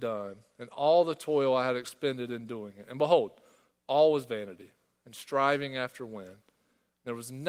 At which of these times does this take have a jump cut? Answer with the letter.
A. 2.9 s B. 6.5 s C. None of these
C